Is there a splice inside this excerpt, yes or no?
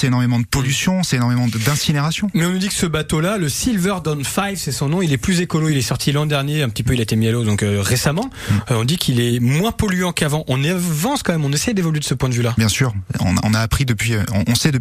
no